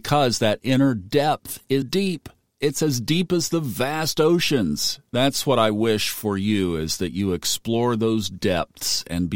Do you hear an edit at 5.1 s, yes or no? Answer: no